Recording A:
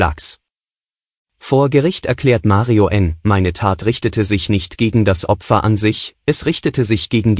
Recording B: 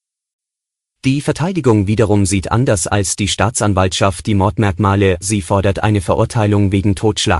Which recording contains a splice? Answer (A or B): B